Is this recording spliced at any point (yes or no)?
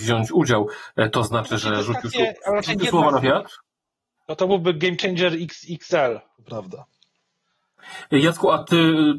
yes